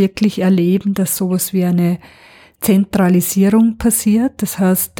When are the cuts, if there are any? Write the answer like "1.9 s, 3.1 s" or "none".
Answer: none